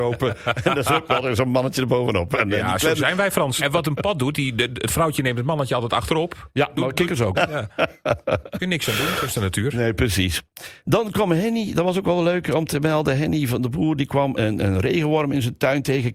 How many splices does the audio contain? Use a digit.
3